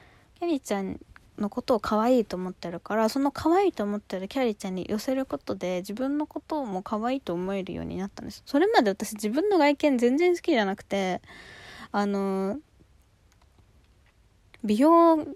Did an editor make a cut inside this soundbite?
no; 0 cuts

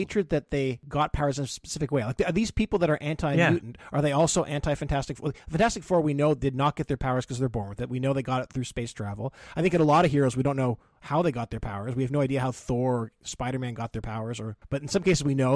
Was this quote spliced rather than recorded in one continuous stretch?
no; 0 cuts

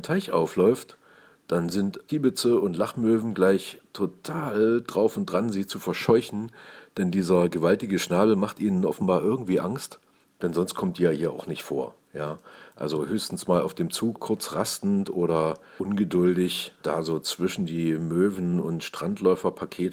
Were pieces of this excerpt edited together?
yes; 1 cut; at 14.2 s

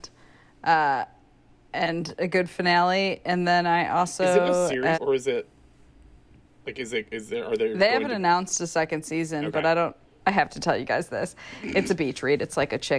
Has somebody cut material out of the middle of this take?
yes; 2 cuts; at 4.9 s, 10.2 s

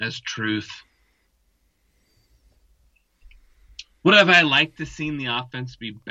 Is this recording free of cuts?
yes; 0 cuts

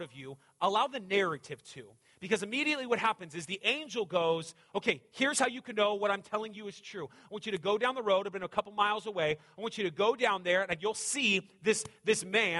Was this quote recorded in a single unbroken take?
yes; 0 cuts

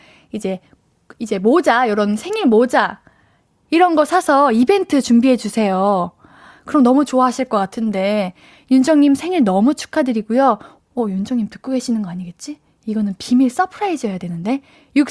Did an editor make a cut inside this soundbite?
no; 0 cuts

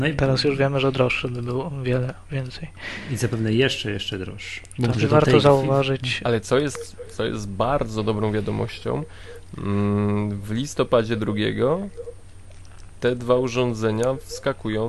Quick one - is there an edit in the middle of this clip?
yes; 2 cuts; at 4.9 s, 6.2 s

